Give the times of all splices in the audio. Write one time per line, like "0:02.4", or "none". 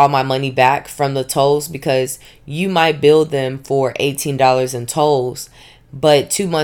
none